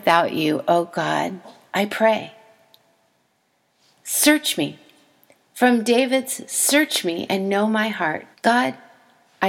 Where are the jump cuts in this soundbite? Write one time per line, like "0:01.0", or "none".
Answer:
0:08.3